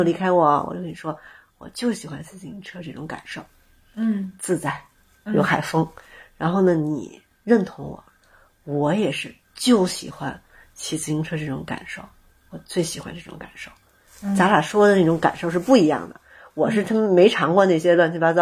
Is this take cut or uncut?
uncut